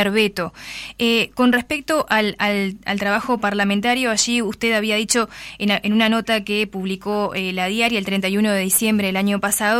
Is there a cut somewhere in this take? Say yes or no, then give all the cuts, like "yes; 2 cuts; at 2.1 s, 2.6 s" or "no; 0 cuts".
no; 0 cuts